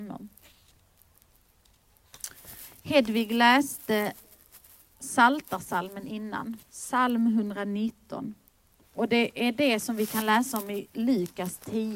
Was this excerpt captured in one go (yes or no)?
no